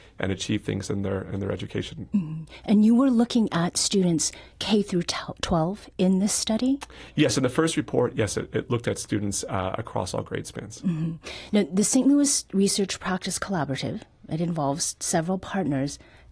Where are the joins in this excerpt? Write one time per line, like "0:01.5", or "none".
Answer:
none